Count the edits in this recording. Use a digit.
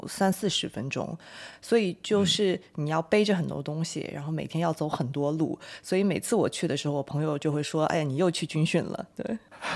0